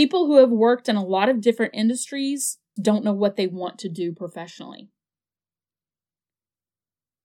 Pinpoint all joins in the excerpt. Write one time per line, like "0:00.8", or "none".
0:02.8